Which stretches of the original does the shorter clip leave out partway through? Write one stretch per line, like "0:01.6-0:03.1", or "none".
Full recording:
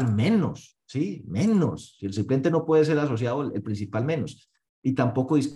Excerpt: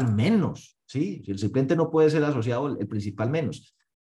0:01.2-0:02.0